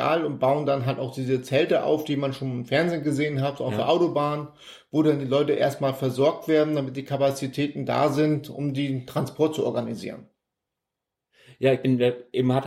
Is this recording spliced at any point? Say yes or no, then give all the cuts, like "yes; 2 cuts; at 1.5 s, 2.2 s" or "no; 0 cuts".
no; 0 cuts